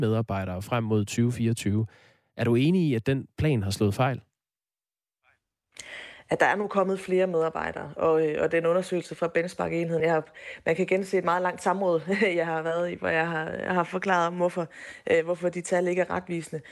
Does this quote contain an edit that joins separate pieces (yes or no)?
no